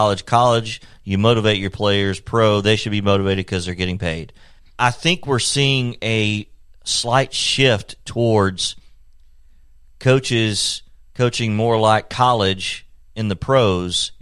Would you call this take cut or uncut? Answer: cut